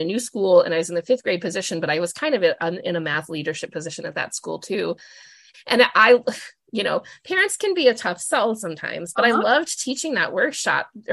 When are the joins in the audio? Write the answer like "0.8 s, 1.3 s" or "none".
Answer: 5.5 s